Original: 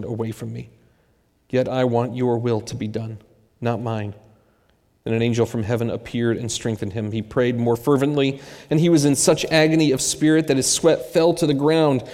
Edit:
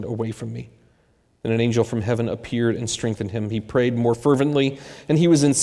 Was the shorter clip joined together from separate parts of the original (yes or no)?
yes